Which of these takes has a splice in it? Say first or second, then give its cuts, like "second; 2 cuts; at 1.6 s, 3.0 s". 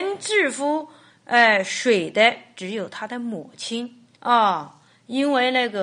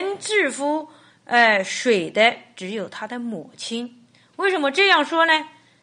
first; 1 cut; at 4.2 s